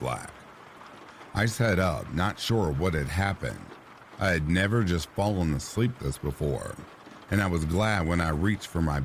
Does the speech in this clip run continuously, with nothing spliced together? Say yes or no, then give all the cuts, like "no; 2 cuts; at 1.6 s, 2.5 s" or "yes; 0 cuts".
no; 1 cut; at 6.0 s